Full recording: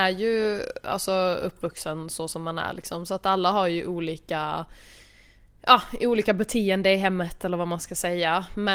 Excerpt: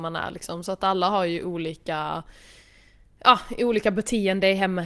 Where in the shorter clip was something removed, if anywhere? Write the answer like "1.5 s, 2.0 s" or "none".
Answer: none